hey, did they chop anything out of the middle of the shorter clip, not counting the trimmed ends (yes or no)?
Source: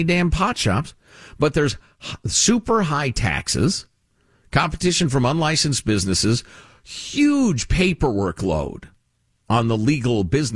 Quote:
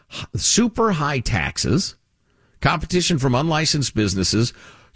no